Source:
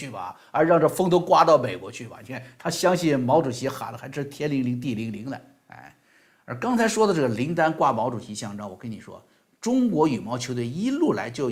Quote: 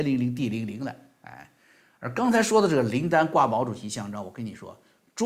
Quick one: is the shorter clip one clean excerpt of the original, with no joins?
yes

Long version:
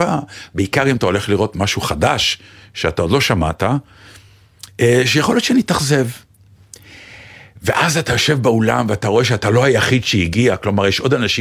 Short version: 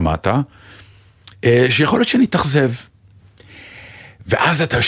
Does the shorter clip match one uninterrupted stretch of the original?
yes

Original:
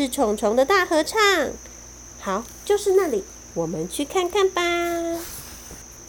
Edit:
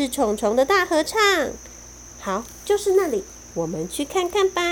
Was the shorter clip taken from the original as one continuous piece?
yes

